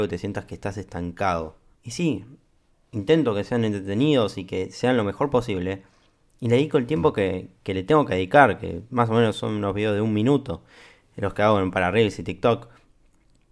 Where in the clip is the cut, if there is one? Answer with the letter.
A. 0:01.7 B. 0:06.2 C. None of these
A